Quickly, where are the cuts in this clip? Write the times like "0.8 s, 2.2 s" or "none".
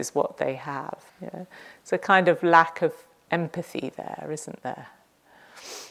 1.1 s